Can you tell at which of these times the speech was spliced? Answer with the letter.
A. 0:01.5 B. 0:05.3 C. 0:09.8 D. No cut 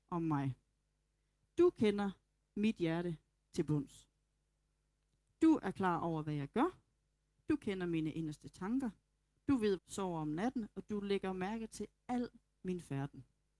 C